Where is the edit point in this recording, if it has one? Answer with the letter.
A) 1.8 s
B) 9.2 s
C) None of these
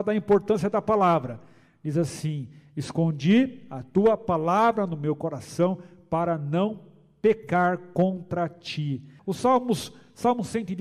B